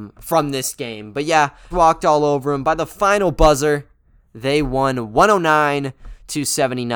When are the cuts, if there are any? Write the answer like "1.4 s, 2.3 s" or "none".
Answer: 1.7 s